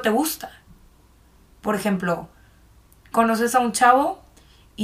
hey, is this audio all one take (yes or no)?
no